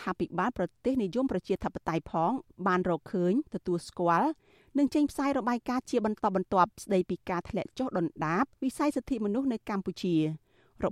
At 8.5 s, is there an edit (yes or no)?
yes